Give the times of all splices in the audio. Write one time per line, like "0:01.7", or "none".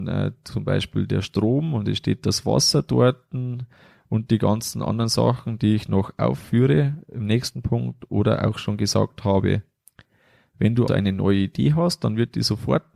0:10.9

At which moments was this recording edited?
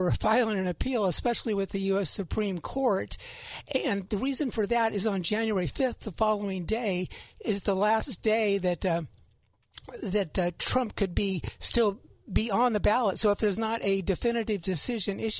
none

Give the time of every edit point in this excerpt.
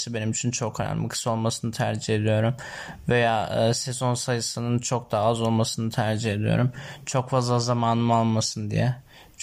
none

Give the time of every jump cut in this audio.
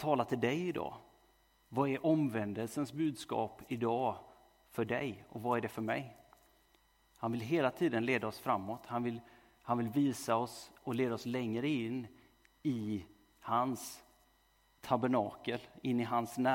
none

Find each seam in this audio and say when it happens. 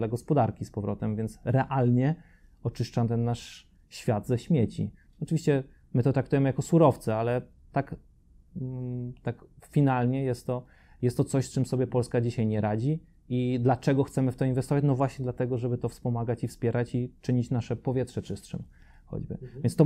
none

